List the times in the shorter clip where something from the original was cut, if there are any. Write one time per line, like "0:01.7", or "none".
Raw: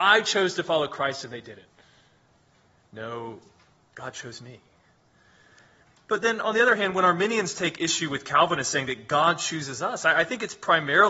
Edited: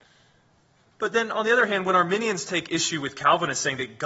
0:00.9